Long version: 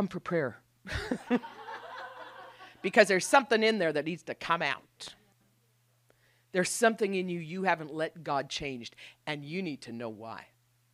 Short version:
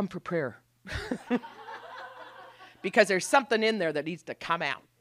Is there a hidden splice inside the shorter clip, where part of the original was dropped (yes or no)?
no